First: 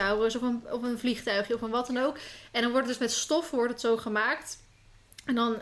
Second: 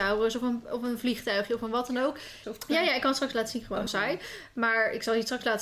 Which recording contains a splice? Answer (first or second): second